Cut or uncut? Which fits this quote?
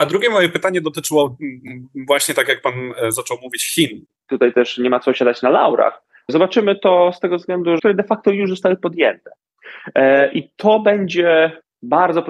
cut